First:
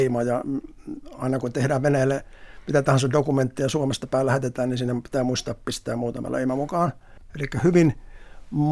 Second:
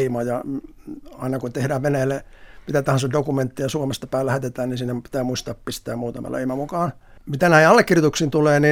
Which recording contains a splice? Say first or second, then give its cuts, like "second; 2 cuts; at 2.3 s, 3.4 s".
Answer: first; 1 cut; at 7.2 s